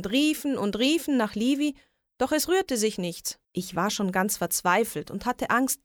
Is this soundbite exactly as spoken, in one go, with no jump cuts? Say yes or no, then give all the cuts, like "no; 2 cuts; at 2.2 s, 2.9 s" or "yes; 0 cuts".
no; 1 cut; at 3.4 s